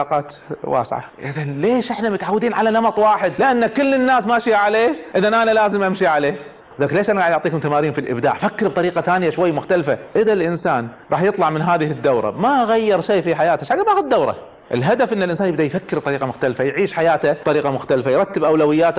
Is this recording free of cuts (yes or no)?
no